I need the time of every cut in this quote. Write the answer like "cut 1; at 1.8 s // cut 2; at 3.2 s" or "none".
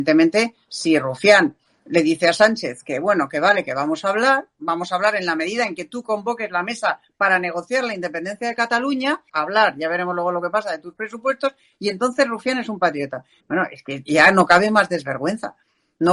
cut 1; at 9.3 s // cut 2; at 13.4 s